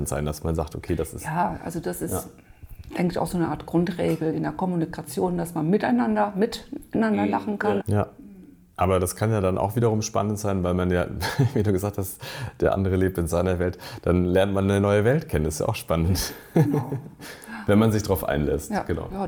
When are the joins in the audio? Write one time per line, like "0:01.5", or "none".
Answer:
0:07.8